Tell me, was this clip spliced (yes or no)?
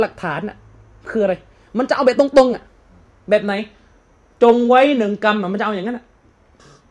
no